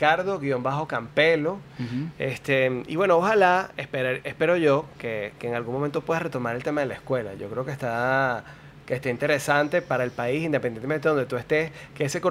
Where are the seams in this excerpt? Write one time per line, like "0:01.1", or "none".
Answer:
none